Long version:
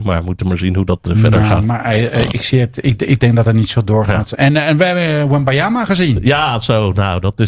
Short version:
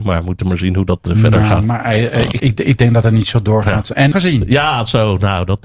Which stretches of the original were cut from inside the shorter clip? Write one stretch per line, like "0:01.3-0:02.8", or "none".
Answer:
0:02.4-0:02.8
0:04.5-0:05.9